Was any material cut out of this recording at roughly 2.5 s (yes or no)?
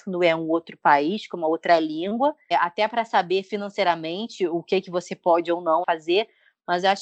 yes